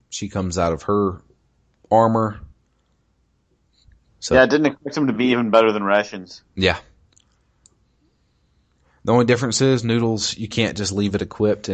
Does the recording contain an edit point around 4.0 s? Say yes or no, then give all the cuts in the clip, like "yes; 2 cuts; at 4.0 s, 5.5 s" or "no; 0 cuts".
yes; 1 cut; at 4.0 s